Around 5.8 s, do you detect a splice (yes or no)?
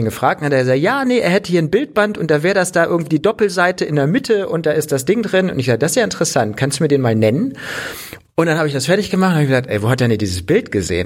no